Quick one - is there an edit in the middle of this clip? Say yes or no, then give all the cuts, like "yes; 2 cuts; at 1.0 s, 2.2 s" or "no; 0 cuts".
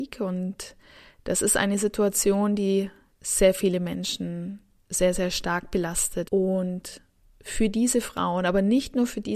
yes; 1 cut; at 6.3 s